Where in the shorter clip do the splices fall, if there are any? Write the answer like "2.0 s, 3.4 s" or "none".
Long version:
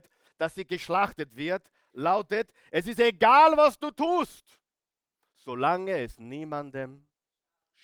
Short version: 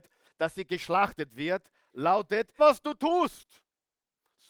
2.6 s